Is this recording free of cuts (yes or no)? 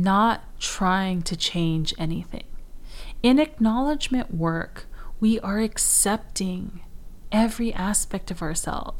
yes